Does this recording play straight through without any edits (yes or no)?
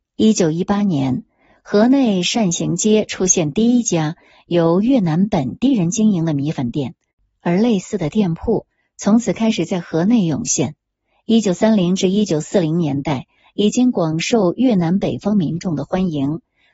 yes